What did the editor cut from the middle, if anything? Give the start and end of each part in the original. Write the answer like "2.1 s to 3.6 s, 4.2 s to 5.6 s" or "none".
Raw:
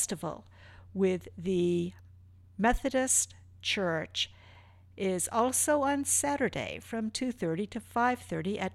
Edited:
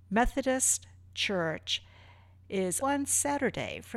5.3 s to 5.8 s